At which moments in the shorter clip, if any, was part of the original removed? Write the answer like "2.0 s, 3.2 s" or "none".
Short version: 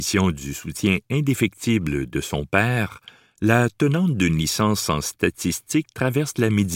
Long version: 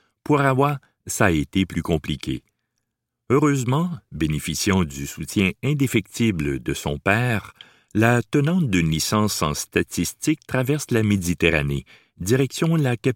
none